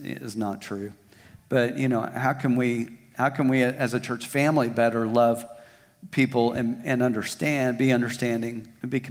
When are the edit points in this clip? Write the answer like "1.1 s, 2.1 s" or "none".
none